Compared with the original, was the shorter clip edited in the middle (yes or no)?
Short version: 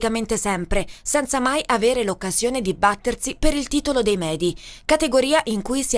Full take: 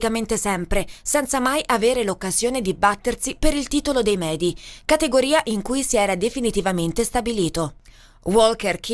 no